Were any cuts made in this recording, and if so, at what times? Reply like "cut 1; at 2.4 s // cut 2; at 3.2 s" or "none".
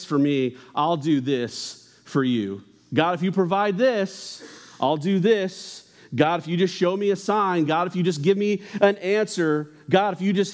none